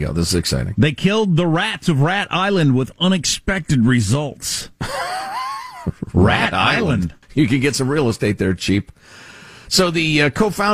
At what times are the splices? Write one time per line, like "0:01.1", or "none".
0:07.2